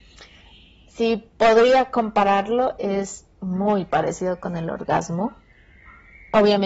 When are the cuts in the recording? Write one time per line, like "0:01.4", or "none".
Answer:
none